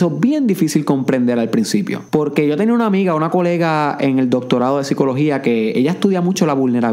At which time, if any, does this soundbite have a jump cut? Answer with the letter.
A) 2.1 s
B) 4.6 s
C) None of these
A